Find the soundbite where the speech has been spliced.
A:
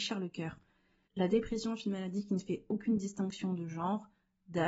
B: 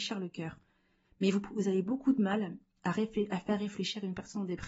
A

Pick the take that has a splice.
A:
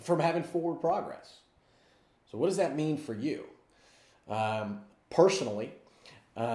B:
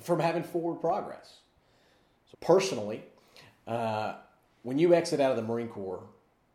B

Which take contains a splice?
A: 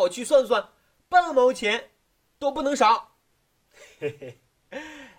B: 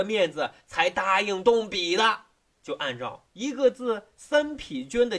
B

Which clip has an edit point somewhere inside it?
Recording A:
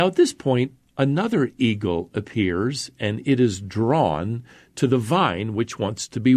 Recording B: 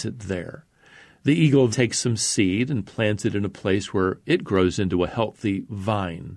B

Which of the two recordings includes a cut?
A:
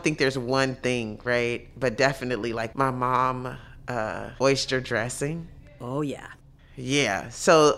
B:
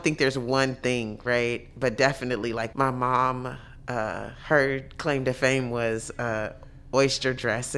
A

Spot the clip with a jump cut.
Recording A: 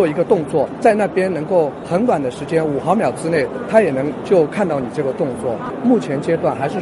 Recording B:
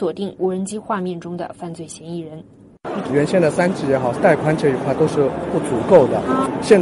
B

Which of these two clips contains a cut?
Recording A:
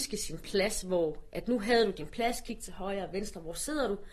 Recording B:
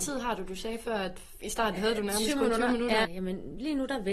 B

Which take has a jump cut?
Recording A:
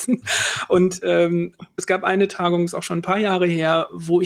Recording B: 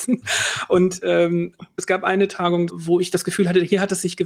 B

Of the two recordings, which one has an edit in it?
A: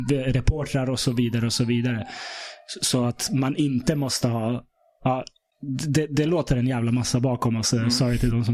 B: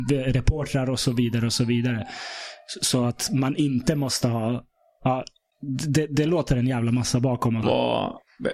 B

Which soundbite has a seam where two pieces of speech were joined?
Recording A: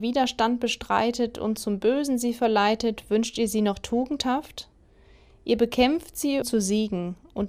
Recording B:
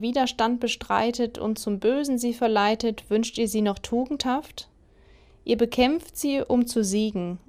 A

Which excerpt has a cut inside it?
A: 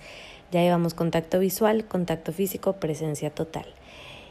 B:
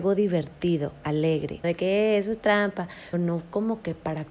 B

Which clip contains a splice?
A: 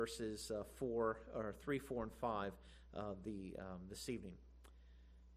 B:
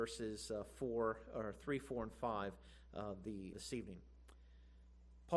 B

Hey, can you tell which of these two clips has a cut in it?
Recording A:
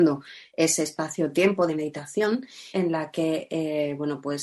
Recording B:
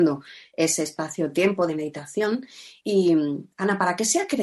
A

